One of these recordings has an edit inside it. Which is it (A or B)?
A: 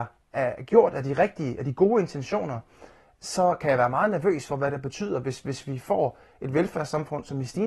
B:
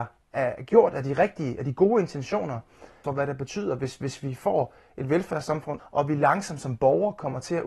B